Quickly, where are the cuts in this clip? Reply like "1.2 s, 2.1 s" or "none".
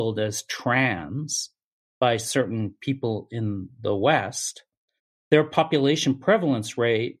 none